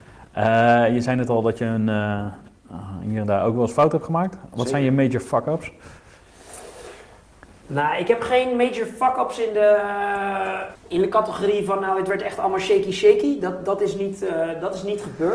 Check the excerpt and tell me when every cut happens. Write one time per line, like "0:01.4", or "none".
0:10.7